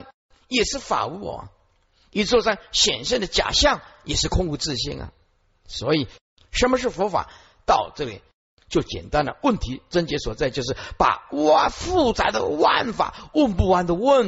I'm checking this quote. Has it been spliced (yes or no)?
no